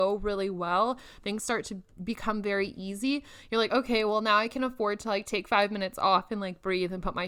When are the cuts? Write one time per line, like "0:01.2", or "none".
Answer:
none